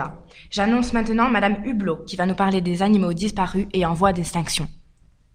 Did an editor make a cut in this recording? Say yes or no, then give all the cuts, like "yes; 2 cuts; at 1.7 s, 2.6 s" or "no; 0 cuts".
no; 0 cuts